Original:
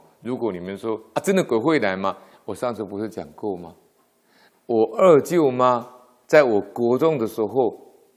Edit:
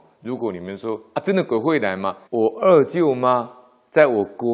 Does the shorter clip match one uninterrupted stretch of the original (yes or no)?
no